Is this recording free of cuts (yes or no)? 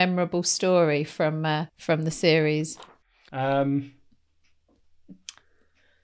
no